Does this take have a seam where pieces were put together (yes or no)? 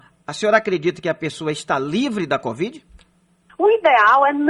yes